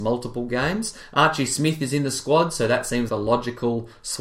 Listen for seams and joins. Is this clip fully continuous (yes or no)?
no